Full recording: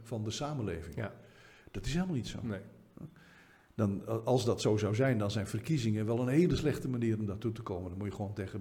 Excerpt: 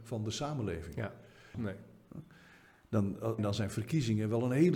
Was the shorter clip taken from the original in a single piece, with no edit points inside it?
no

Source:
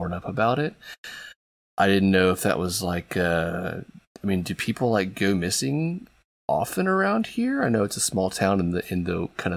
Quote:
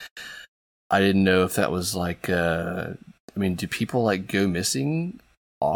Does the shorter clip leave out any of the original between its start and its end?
no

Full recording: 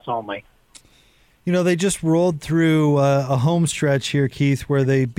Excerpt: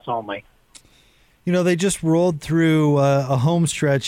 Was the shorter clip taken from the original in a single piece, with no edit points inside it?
yes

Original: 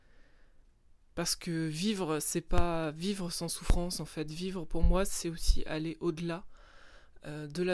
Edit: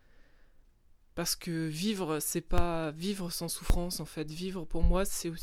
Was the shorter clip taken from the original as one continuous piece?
yes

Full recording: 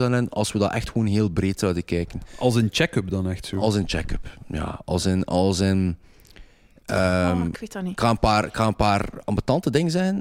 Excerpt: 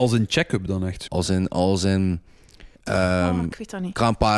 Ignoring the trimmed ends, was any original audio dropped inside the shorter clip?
yes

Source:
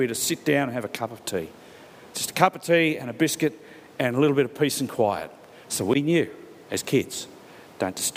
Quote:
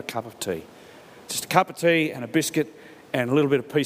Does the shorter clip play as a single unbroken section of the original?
yes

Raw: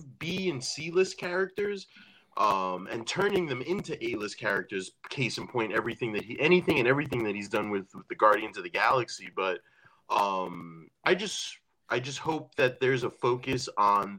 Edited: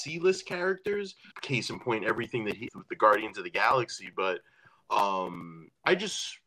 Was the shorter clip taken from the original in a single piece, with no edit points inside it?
no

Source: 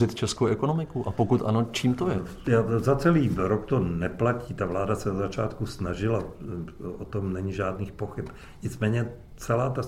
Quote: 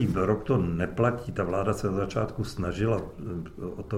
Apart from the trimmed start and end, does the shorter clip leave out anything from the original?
no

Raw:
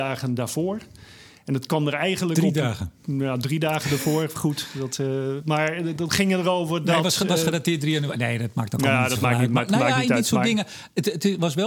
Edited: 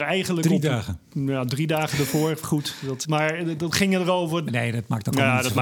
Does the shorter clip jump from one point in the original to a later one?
yes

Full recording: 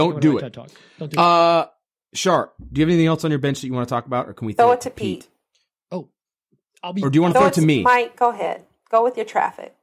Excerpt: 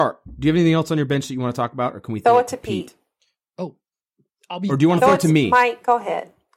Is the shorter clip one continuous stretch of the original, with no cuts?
yes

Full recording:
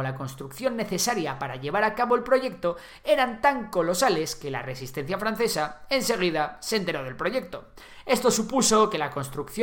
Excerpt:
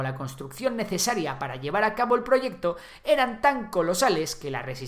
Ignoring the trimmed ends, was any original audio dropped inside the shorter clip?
no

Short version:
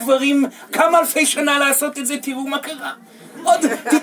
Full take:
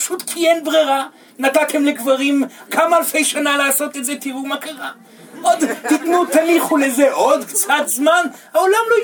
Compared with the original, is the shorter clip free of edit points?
yes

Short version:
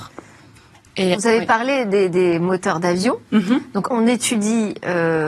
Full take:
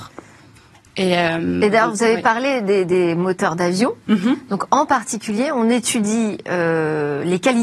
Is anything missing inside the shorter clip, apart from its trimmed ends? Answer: yes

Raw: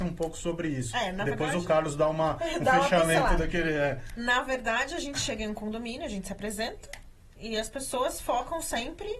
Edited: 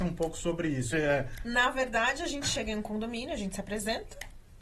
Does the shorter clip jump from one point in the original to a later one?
yes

